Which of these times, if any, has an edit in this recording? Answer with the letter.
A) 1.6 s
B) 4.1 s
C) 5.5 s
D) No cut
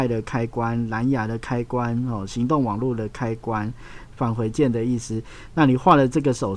B